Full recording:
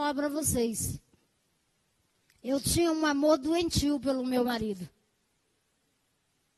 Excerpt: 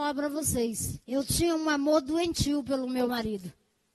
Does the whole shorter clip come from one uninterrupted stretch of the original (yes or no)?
no